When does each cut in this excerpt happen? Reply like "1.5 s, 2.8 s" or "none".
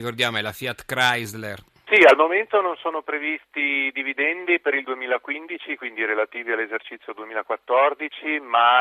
1.9 s

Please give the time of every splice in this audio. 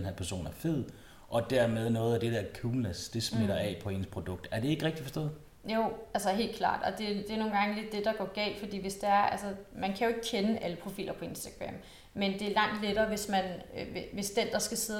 none

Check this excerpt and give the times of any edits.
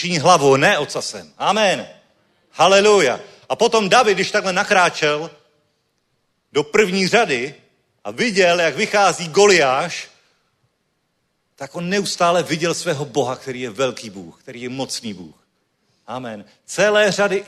none

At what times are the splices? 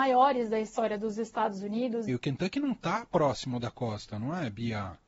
2.1 s

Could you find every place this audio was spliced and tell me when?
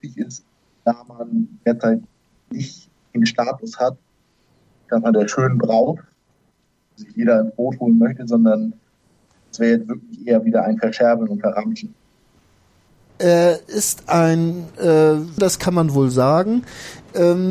13.1 s, 15.4 s

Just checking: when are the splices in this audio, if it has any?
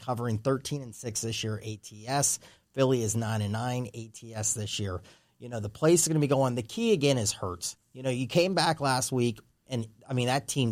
none

